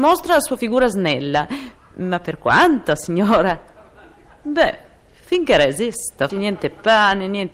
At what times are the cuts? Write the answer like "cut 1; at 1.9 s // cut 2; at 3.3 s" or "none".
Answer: cut 1; at 6.3 s